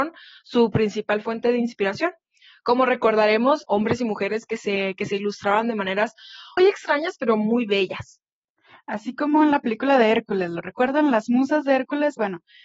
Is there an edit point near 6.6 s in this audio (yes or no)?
yes